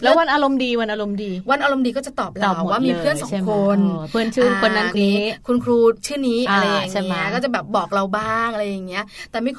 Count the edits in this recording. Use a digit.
1